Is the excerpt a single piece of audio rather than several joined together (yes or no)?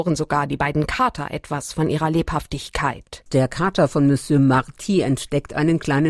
no